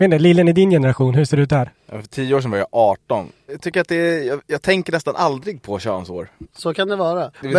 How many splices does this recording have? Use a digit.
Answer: 2